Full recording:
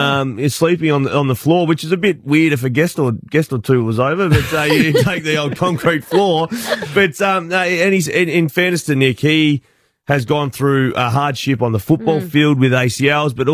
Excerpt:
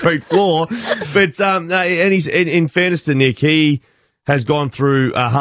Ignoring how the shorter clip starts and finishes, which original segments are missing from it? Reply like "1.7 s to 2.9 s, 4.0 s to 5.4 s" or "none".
none